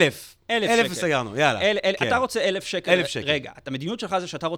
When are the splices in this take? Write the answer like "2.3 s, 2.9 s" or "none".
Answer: none

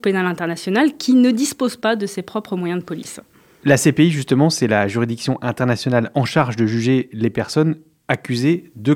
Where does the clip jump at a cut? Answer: none

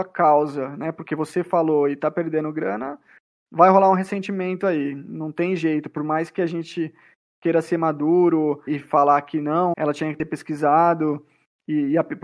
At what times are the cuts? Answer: 8.7 s, 9.7 s

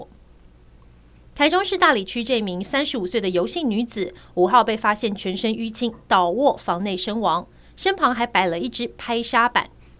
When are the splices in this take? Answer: none

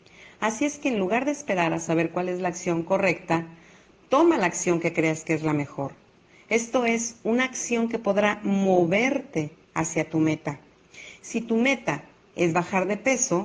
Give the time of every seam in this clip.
none

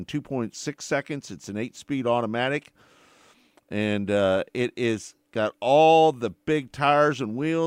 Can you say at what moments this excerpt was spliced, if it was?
none

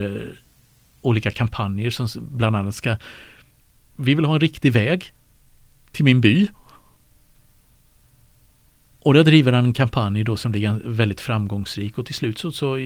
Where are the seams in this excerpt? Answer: none

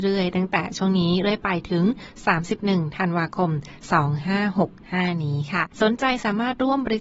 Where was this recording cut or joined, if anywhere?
5.7 s

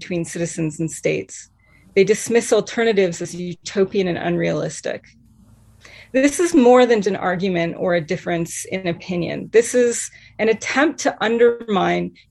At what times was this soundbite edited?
7.0 s

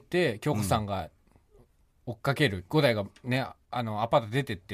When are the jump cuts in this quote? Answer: 2.7 s

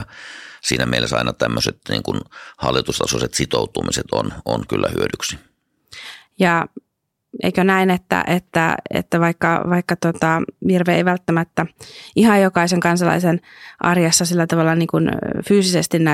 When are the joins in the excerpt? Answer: none

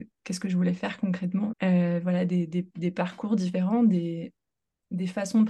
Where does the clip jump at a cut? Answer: 1.5 s

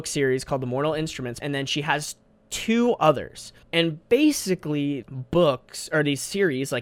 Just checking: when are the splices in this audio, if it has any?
1.4 s, 3.6 s, 5.0 s

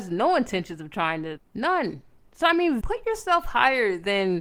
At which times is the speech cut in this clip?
1.4 s, 2.8 s

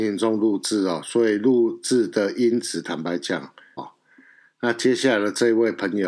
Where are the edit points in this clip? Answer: 3.8 s

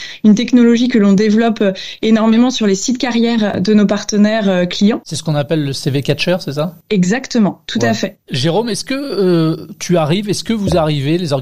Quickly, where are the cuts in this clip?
5.0 s

